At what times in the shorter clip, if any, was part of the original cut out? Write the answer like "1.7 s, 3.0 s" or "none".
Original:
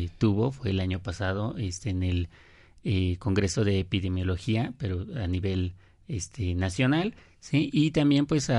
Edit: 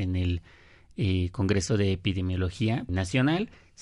2.9 s

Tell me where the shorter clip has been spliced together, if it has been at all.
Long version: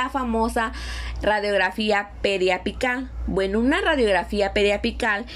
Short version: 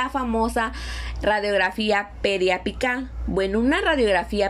none

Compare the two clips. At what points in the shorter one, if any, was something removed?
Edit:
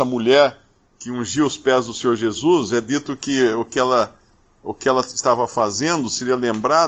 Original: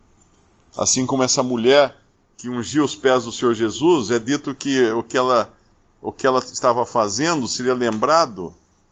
none

